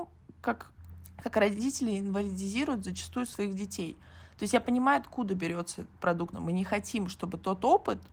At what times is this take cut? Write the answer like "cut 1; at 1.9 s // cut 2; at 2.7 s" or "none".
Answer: cut 1; at 6.3 s